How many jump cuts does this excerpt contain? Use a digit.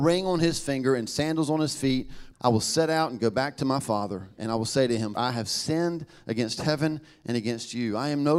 2